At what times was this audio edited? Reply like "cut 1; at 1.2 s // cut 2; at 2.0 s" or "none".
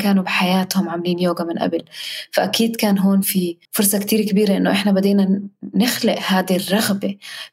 cut 1; at 3.7 s